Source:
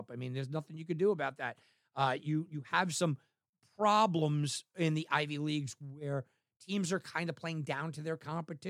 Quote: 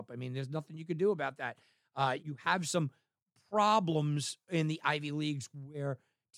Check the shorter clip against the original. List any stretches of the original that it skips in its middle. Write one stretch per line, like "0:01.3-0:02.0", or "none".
0:02.2-0:02.5